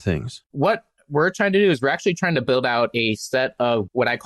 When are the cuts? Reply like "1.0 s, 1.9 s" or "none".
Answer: none